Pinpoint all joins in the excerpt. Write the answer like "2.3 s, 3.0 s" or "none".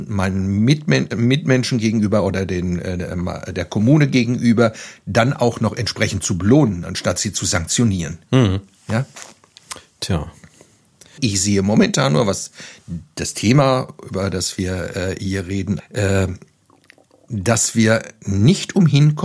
11.2 s, 15.8 s